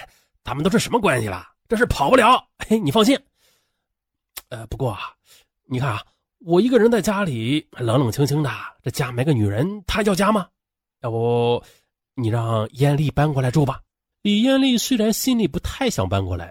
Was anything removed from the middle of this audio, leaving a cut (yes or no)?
yes